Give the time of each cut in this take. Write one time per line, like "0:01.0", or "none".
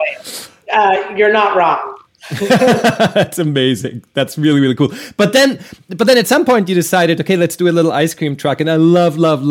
none